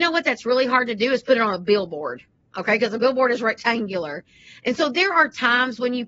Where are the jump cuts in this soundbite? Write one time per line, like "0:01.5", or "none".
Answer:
none